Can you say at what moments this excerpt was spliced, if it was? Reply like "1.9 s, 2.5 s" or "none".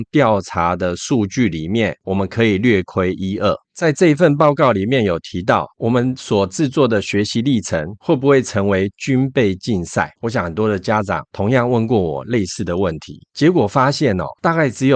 none